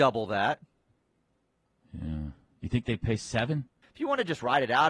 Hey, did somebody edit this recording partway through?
yes; 1 cut; at 3.8 s

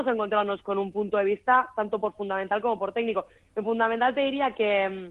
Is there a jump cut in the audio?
no; 0 cuts

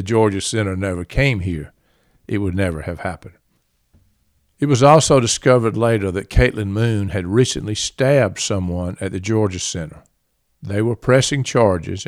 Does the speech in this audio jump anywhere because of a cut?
no; 0 cuts

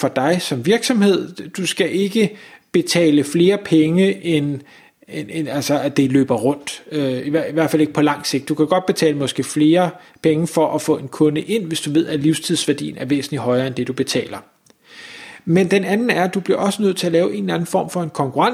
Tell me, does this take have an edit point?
no; 0 cuts

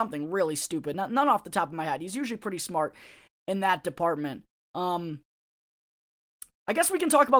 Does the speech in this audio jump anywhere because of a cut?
no; 0 cuts

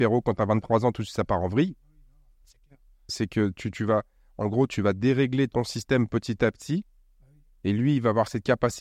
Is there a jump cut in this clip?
yes; 1 cut; at 3.1 s

